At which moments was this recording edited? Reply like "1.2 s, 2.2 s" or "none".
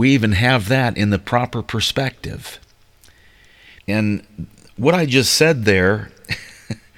3.8 s